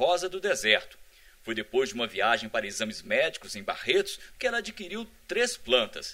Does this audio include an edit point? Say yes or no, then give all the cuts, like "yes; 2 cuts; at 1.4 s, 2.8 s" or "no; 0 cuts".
yes; 1 cut; at 4.3 s